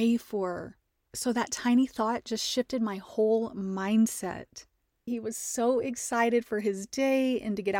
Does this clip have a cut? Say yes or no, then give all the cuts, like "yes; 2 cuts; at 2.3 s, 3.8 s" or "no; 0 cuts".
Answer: yes; 2 cuts; at 1.1 s, 5.1 s